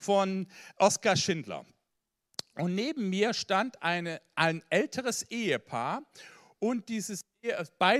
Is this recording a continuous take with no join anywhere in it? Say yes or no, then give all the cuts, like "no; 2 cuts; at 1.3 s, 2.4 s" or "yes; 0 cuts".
yes; 0 cuts